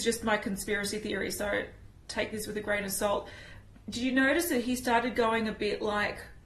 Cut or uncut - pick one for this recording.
uncut